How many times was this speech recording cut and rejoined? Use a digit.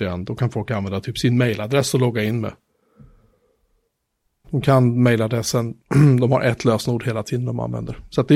1